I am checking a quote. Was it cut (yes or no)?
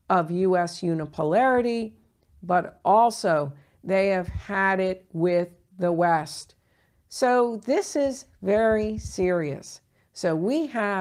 yes